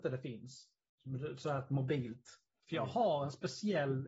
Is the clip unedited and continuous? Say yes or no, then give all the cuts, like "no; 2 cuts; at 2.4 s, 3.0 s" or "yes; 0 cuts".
no; 1 cut; at 2.6 s